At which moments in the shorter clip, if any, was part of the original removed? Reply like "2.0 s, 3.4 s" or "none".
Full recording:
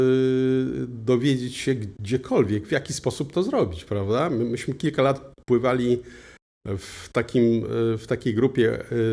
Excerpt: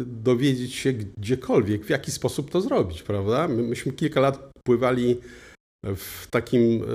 none